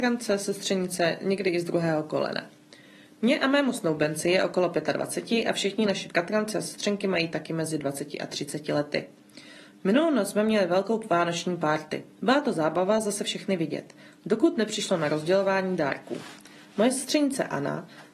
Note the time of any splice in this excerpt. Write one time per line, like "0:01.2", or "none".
0:12.1